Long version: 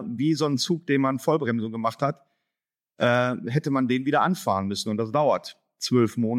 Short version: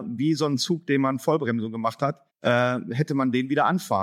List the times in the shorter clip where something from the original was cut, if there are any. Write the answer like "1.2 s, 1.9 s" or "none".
2.3 s